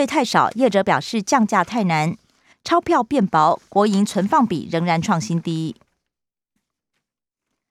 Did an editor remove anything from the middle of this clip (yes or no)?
yes